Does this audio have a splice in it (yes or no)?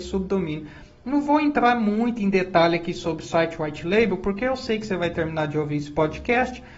no